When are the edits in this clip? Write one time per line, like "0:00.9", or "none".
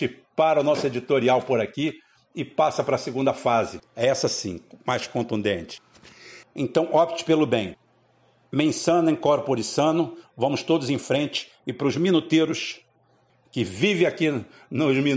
0:06.4
0:13.3